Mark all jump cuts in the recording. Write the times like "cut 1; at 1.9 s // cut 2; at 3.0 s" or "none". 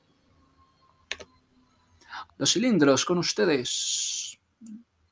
cut 1; at 2.3 s